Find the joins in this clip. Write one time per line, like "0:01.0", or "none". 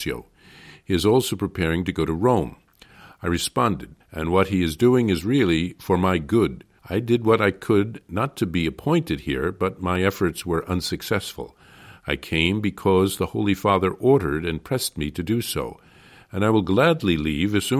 0:04.0
0:06.8